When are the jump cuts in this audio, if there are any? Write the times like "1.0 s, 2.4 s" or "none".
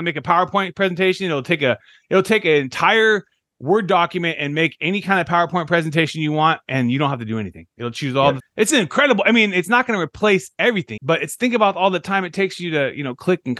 8.4 s, 11.0 s